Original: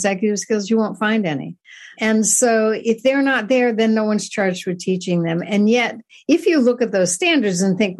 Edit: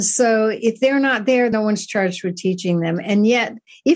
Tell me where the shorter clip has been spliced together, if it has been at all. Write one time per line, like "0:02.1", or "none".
0:01.5